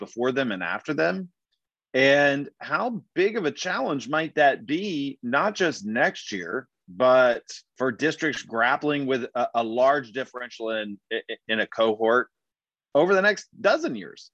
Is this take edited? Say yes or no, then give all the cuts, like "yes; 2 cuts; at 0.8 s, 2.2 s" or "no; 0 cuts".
no; 0 cuts